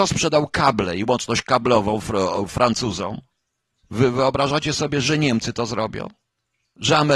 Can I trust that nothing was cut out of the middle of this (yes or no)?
no